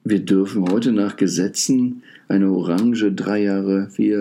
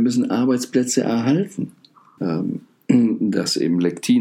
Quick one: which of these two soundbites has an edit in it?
second; 1 cut; at 2.2 s

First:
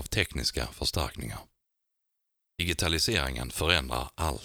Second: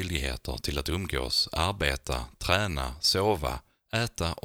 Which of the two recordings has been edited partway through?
first; 1 cut; at 2.4 s

